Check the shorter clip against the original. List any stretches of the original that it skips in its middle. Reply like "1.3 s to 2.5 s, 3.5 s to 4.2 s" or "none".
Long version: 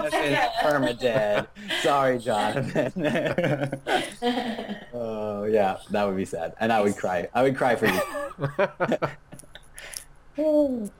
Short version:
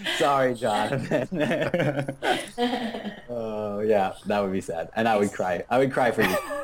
none